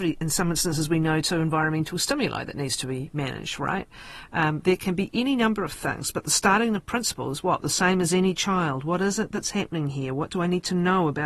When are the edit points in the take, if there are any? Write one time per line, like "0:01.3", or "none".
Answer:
none